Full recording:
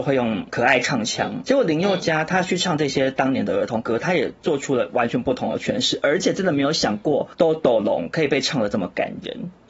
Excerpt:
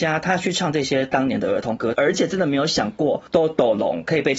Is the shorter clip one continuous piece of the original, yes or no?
no